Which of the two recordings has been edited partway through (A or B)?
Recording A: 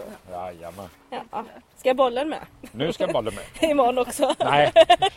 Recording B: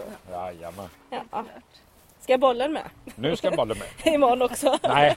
A